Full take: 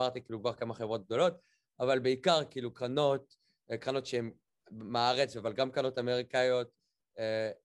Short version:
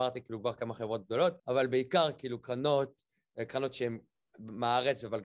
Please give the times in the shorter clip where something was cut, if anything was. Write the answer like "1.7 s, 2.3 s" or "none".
1.4 s